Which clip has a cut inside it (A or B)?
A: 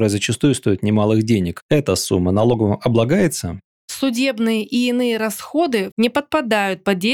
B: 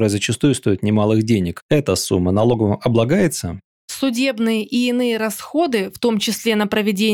A